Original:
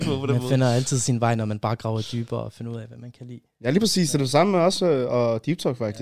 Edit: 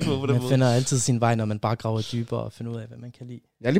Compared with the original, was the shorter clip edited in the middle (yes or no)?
no